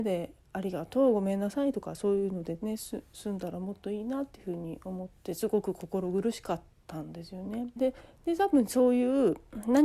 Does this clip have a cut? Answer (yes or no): yes